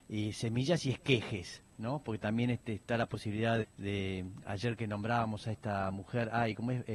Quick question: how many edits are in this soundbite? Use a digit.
1